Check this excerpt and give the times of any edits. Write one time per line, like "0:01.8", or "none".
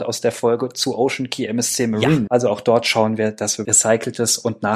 0:02.3
0:03.6